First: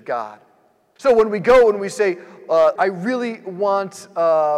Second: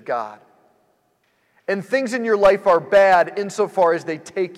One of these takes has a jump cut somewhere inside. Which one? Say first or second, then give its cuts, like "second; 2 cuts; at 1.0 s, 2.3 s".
first; 2 cuts; at 1.0 s, 2.8 s